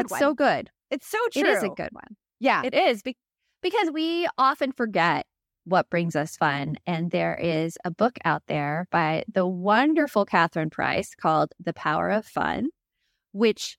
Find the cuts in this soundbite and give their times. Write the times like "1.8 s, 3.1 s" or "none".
none